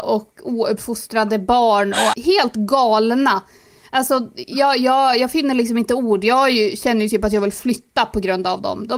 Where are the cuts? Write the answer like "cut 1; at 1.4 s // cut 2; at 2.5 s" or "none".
cut 1; at 2.1 s